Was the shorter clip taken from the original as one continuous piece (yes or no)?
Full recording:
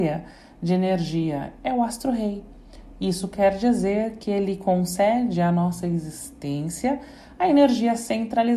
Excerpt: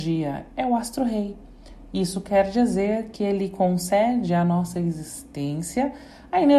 yes